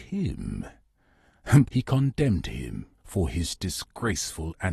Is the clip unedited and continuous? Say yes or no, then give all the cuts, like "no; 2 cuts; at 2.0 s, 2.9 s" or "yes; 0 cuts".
no; 2 cuts; at 1.7 s, 3.0 s